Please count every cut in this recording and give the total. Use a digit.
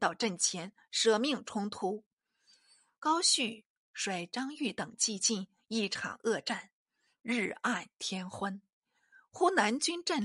1